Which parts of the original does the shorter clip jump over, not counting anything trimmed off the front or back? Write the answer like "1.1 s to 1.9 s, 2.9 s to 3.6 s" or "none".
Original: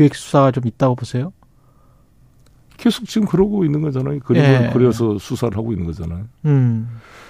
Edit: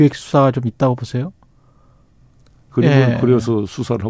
2.7 s to 4.2 s